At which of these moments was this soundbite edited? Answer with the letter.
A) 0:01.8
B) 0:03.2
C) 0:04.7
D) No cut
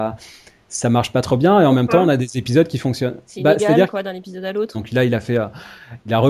C